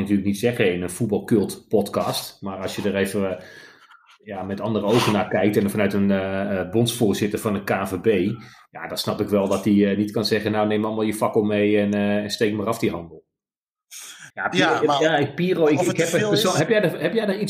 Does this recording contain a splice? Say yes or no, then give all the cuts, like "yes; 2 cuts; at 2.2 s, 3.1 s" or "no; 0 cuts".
yes; 1 cut; at 14.3 s